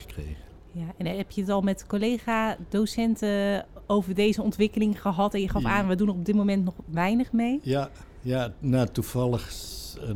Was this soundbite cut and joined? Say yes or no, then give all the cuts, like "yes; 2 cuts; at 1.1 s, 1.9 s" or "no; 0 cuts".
no; 0 cuts